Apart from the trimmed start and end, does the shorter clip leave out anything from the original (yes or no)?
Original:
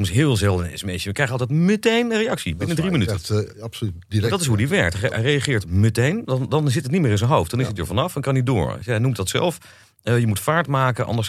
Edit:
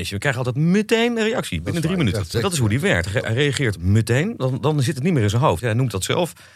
yes